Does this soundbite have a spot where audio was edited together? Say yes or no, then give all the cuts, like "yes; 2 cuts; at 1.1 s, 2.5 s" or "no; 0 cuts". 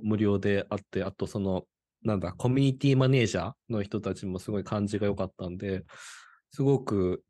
no; 0 cuts